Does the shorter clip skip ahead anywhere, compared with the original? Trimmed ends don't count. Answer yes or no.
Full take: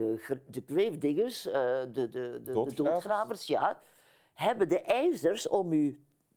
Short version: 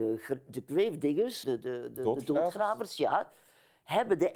yes